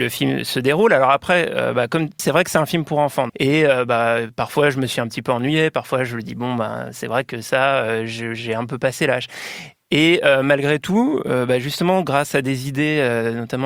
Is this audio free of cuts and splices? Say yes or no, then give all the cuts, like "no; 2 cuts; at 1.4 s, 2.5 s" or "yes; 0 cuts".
no; 2 cuts; at 2.2 s, 3.3 s